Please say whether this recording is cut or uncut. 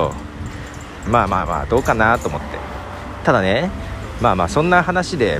cut